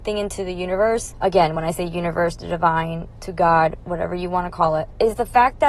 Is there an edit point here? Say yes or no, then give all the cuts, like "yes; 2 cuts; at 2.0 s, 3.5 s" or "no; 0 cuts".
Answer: no; 0 cuts